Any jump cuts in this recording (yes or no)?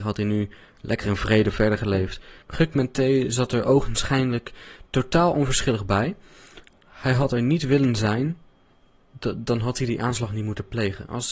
yes